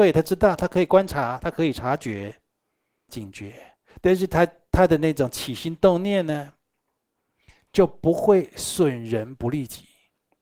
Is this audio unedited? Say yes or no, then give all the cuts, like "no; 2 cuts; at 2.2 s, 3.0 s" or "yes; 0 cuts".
no; 1 cut; at 3.1 s